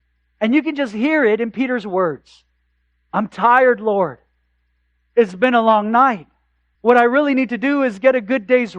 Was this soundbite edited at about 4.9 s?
no; 1 cut; at 6.7 s

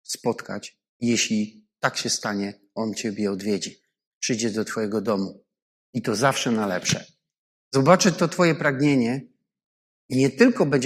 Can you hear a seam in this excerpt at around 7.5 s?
yes; 2 cuts; at 5.7 s, 7.5 s

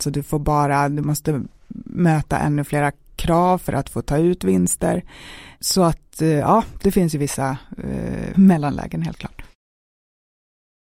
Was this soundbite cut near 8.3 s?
yes; 1 cut; at 8.3 s

